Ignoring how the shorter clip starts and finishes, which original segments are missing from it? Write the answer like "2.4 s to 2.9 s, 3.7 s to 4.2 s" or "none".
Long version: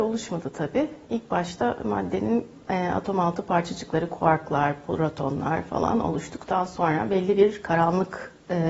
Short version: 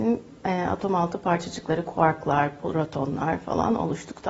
none